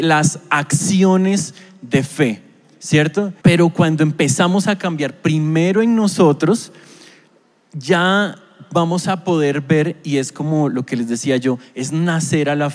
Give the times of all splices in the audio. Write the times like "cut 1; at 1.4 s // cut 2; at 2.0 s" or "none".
cut 1; at 3.4 s